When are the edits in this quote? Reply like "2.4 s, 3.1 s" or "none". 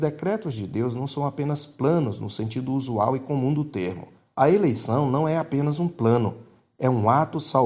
4.3 s